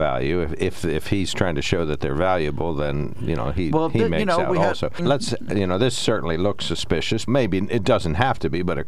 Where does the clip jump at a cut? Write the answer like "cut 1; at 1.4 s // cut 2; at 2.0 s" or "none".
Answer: cut 1; at 5.0 s // cut 2; at 7.3 s